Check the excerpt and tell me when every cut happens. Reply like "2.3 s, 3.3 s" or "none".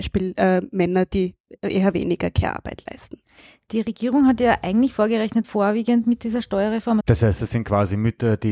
5.4 s, 7.0 s